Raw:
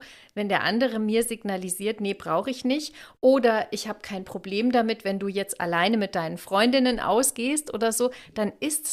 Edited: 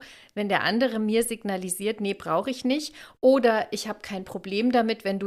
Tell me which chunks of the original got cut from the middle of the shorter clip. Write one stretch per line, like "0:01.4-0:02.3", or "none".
none